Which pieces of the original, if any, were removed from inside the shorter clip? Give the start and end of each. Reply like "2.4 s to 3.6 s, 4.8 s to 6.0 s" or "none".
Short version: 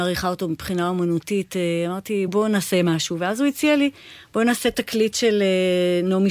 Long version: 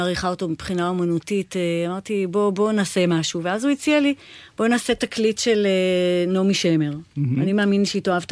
2.3 s to 2.5 s